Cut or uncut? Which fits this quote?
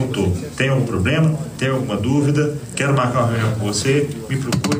uncut